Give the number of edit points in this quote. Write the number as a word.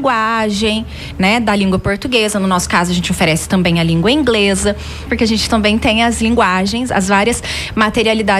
two